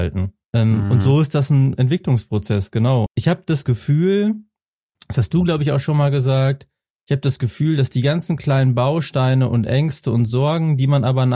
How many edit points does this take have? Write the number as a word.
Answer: one